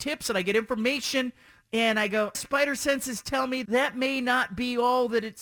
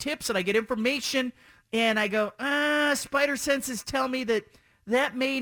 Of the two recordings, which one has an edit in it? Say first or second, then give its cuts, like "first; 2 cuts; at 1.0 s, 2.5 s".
first; 2 cuts; at 2.3 s, 3.6 s